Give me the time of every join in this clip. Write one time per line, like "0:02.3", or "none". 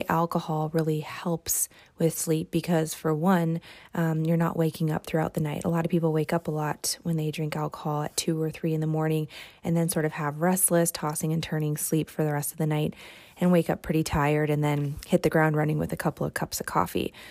none